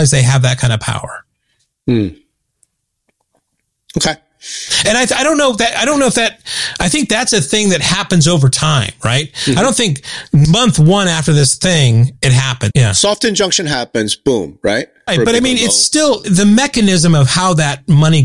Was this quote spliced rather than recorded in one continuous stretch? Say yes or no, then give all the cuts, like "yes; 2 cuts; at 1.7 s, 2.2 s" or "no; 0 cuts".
yes; 3 cuts; at 12.7 s, 15.1 s, 16.2 s